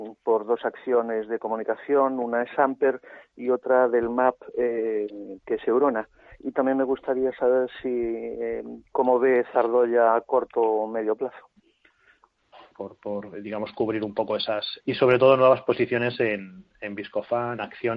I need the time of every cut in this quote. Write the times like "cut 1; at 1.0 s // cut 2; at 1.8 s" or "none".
cut 1; at 12.7 s // cut 2; at 14.8 s